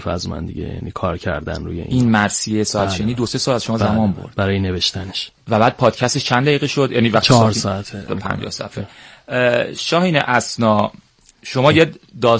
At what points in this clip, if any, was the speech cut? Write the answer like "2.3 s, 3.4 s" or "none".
8.1 s